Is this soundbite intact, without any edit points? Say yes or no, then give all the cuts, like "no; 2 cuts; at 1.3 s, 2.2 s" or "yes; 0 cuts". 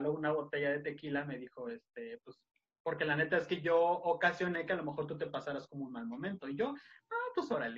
yes; 0 cuts